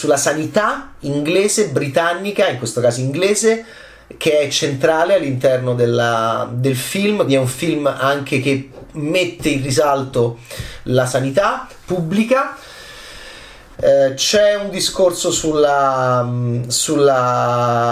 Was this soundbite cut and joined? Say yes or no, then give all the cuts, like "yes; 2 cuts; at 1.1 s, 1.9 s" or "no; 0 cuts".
yes; 2 cuts; at 7.3 s, 13.7 s